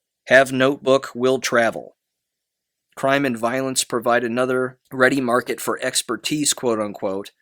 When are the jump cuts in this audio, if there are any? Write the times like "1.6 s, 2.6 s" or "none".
2.7 s, 4.9 s